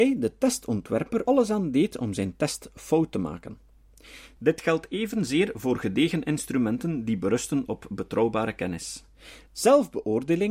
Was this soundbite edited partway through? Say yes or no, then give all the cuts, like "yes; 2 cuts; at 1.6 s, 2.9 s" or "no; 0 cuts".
yes; 1 cut; at 1.3 s